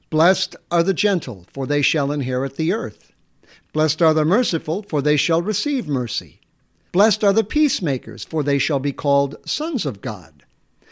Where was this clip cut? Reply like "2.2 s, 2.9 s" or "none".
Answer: 3.6 s, 6.9 s